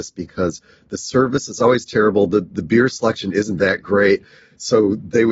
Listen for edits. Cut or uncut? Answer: uncut